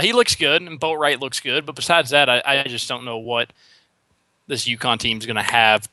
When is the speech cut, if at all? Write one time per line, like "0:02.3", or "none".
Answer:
none